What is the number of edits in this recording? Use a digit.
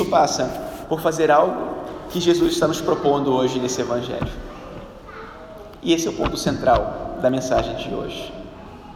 0